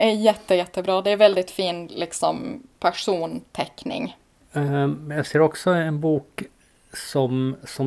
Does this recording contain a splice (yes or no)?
no